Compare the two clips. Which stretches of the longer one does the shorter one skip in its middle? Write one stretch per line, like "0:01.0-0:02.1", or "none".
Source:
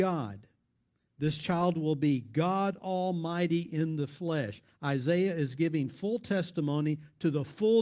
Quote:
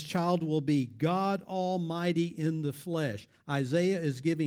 none